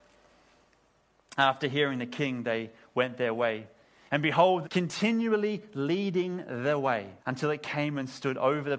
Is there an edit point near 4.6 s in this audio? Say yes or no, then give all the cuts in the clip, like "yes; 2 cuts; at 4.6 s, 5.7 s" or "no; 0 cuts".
yes; 2 cuts; at 4.6 s, 7.2 s